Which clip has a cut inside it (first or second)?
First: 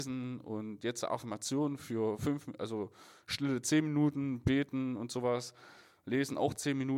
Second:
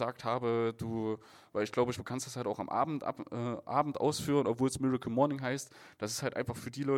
second